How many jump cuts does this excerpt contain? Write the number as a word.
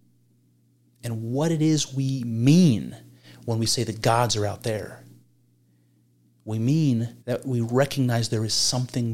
one